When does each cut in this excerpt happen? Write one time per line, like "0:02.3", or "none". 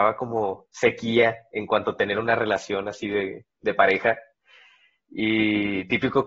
none

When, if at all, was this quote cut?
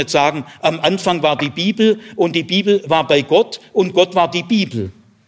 none

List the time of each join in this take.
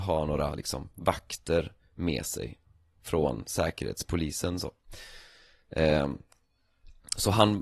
none

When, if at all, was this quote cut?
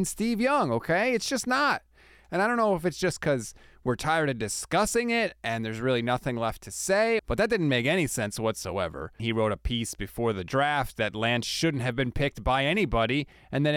0:07.2
0:09.2

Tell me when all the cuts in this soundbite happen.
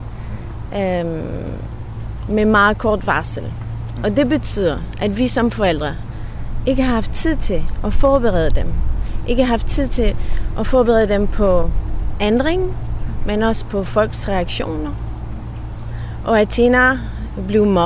none

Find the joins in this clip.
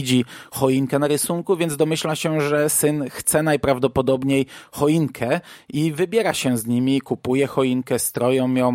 none

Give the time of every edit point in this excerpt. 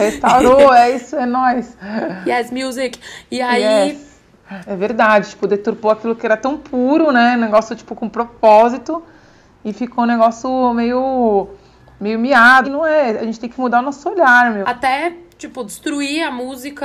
0:04.7
0:12.6
0:14.6

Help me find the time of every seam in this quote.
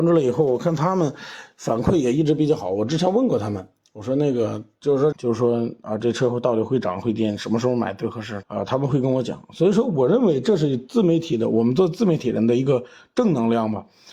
0:05.1
0:08.4

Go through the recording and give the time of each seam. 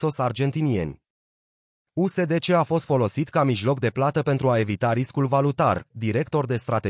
0:05.9

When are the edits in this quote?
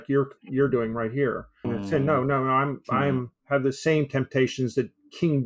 0:01.6
0:03.4

